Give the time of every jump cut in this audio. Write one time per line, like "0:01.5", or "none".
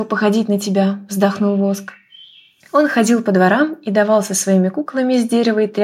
0:02.6